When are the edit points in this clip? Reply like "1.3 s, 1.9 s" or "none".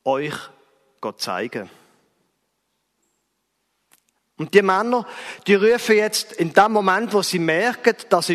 4.2 s